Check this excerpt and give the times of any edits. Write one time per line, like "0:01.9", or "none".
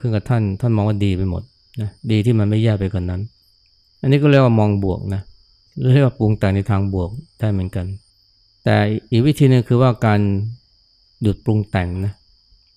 none